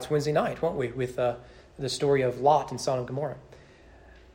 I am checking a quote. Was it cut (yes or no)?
no